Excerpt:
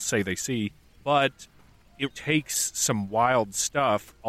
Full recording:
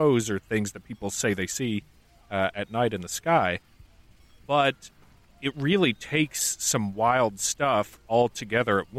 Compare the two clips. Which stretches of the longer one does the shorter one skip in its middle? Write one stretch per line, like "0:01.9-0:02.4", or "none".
0:02.0-0:04.4
0:05.5-0:06.0